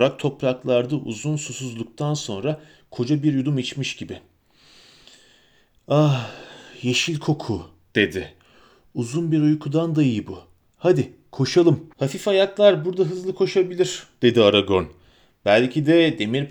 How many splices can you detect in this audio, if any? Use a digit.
1